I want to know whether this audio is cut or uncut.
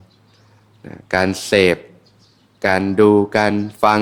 uncut